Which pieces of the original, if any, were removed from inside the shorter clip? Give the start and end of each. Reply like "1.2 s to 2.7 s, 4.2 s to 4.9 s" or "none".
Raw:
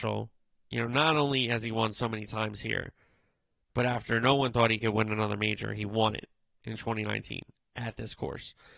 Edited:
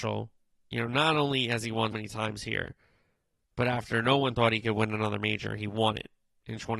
1.9 s to 2.1 s